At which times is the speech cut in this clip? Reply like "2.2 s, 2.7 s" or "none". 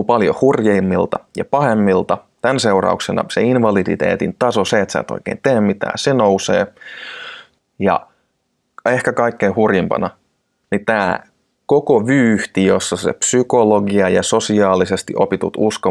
7.6 s